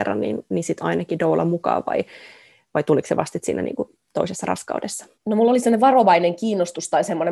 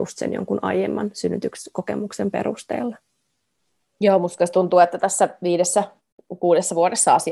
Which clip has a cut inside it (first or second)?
first